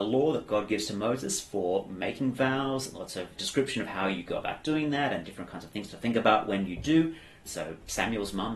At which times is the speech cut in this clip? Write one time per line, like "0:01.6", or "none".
0:03.4
0:07.5